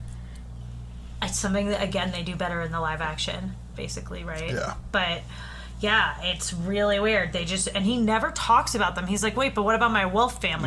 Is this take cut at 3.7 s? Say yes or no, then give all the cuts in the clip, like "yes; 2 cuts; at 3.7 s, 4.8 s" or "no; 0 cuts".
yes; 1 cut; at 3.7 s